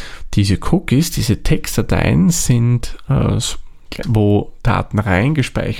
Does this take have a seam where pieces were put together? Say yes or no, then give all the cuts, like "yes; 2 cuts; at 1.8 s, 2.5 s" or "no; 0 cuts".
yes; 1 cut; at 4.0 s